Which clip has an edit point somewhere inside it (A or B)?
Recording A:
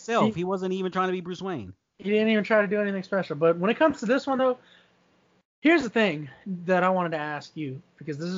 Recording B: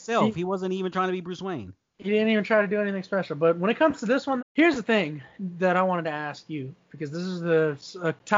B